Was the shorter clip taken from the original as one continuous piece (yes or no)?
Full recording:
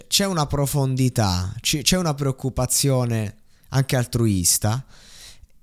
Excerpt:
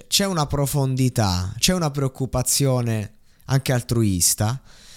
no